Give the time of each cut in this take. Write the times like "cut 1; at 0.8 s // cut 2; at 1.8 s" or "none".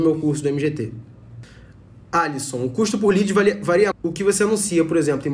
cut 1; at 3.9 s